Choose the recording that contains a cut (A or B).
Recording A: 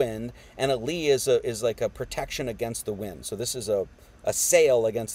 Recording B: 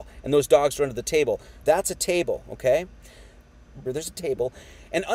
B